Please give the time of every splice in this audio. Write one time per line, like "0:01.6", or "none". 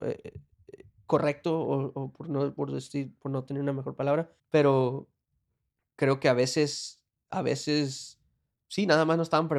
0:04.4